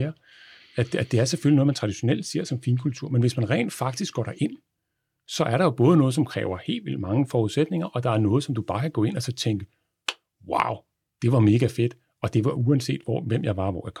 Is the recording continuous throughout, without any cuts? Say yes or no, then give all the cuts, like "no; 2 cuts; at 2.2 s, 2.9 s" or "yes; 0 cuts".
yes; 0 cuts